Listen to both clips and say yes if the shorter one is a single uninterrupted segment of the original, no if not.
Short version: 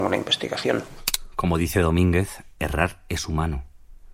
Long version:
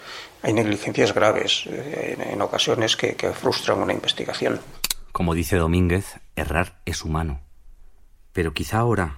yes